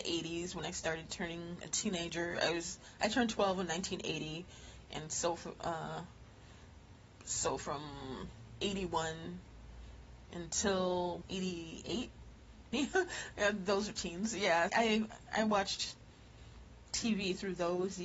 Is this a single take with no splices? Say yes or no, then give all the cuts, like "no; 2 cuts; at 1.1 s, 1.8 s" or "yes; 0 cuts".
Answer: no; 3 cuts; at 11.2 s, 12.7 s, 14.7 s